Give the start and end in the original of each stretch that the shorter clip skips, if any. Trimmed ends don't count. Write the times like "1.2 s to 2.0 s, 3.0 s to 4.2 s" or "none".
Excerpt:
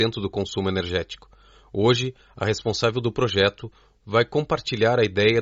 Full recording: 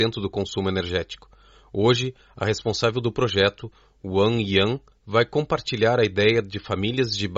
3.9 s to 5.0 s